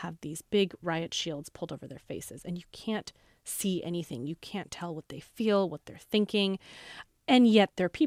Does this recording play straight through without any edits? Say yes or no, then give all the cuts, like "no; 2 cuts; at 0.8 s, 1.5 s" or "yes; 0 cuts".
yes; 0 cuts